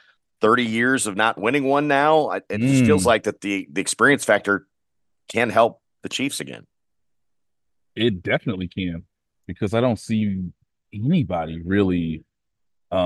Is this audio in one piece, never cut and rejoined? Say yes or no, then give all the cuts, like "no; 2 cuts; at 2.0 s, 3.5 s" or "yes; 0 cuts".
yes; 0 cuts